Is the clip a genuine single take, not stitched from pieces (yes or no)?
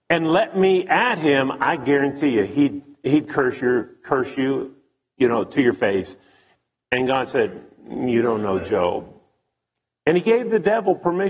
yes